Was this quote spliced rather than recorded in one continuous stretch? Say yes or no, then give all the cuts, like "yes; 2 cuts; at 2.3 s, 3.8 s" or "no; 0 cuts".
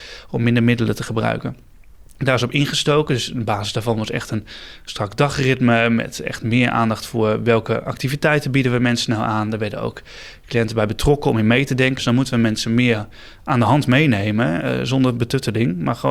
yes; 1 cut; at 12.0 s